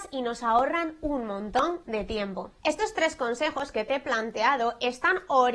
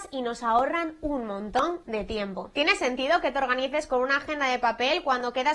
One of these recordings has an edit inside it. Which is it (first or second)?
second